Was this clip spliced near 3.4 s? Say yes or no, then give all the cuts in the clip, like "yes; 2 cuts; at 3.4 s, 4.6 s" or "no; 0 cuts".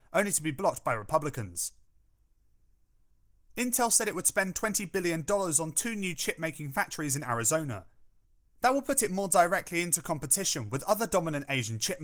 no; 1 cut; at 8.4 s